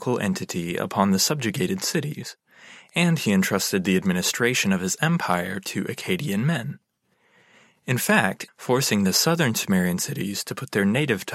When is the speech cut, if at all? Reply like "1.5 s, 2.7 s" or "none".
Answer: 8.5 s